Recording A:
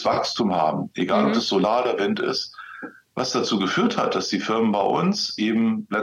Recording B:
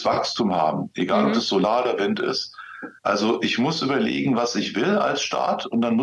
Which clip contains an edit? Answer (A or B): B